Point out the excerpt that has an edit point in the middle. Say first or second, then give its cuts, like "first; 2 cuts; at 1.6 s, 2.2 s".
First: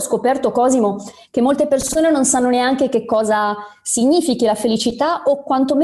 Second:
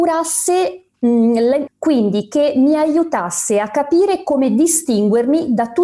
second; 1 cut; at 1.7 s